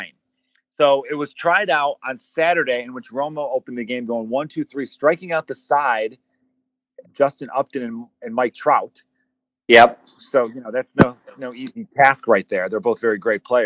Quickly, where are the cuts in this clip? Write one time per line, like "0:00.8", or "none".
0:07.0